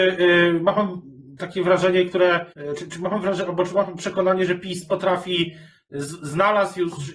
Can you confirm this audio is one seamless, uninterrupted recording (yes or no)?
no